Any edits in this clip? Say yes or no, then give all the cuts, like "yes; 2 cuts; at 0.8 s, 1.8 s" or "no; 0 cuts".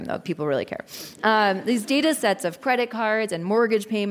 no; 0 cuts